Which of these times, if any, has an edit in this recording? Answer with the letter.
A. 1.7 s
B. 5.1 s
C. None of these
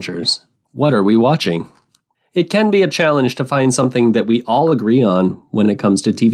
C